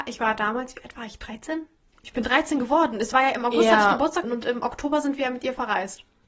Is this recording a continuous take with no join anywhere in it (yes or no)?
no